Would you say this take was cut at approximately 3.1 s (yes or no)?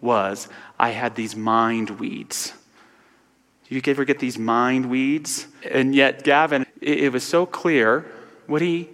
no